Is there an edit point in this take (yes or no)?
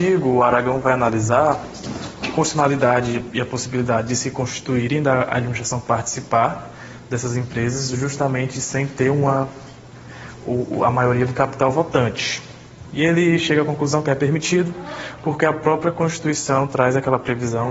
no